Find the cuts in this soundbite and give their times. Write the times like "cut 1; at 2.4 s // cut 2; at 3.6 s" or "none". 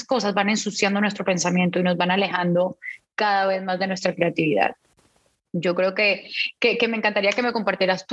none